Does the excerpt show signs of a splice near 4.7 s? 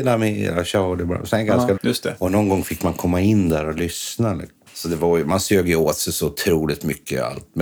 yes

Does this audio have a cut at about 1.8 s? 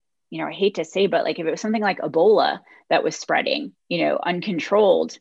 no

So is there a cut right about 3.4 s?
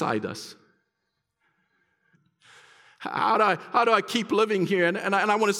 no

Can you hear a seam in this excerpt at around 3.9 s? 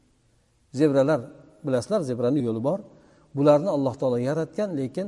no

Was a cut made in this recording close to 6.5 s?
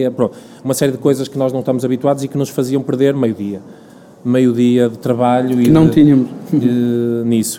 no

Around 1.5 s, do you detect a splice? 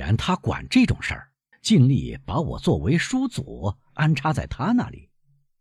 yes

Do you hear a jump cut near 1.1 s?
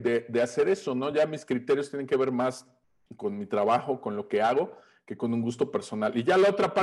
no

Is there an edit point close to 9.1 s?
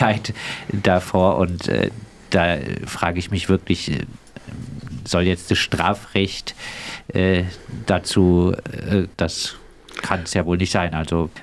yes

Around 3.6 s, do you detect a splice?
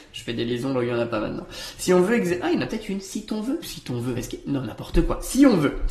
yes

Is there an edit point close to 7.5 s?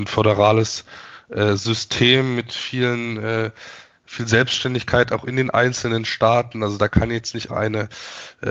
yes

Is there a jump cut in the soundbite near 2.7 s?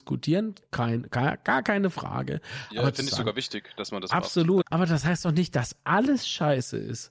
no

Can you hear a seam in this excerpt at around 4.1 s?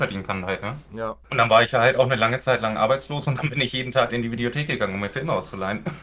yes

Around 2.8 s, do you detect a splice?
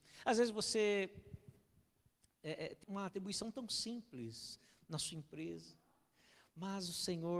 yes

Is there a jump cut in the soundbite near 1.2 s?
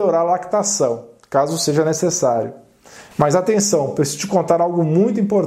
no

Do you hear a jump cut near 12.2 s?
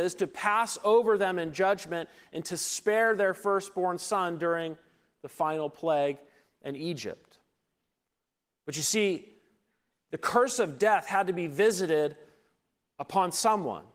no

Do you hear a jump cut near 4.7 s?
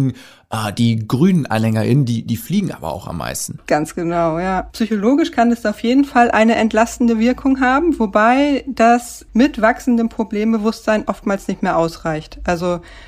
yes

